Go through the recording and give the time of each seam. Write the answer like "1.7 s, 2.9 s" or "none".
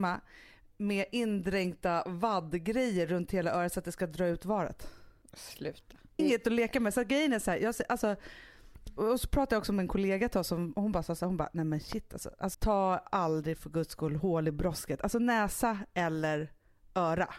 6.2 s, 12.5 s